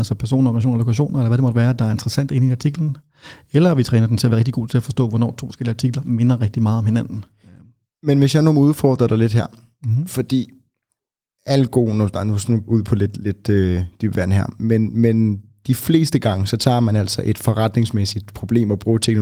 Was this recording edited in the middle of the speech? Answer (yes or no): yes